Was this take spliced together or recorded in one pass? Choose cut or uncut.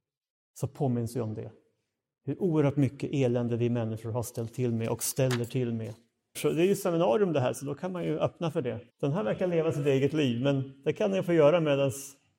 cut